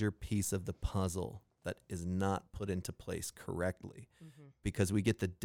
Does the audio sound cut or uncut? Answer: uncut